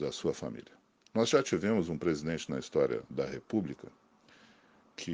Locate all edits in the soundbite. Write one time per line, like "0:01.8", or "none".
none